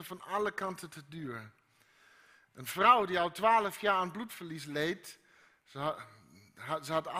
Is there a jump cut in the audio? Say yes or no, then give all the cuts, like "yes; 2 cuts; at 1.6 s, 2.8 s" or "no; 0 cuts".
no; 0 cuts